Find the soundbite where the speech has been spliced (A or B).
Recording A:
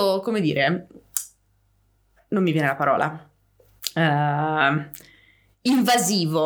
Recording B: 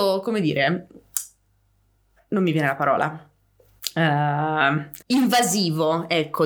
B